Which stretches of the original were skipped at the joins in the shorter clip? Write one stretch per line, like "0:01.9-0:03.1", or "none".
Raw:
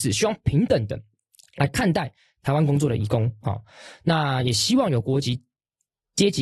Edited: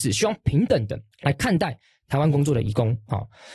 0:01.1-0:01.5